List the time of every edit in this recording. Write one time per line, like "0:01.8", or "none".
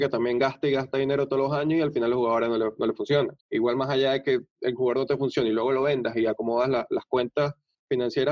0:03.4